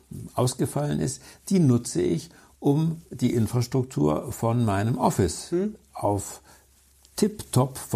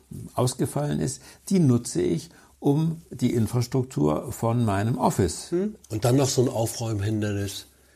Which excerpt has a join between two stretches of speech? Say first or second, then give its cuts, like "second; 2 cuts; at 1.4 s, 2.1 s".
second; 1 cut; at 5.8 s